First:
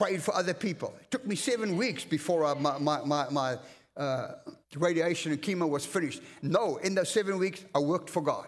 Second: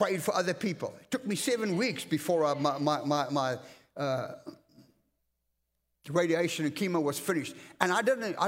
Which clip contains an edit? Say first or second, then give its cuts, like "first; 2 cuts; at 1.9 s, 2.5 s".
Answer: first; 2 cuts; at 4.6 s, 6.4 s